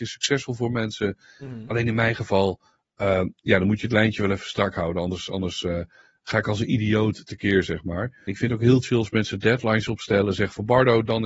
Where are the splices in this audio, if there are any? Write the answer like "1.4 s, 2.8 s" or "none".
8.3 s